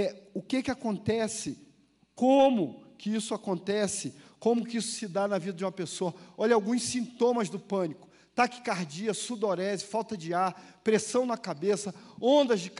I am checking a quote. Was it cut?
no; 0 cuts

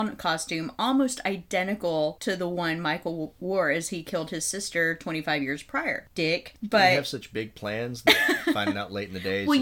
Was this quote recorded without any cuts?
no; 1 cut; at 6.1 s

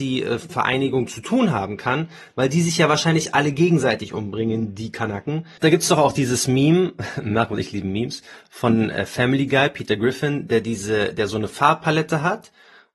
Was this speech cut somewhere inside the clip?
yes; 1 cut; at 5.6 s

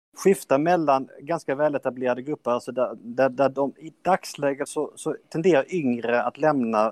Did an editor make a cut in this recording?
no; 0 cuts

